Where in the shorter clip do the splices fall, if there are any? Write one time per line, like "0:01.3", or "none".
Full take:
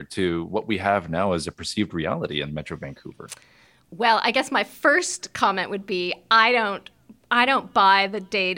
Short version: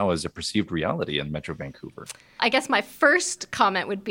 0:02.4